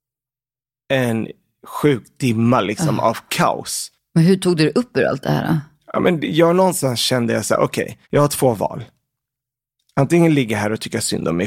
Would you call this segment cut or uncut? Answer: cut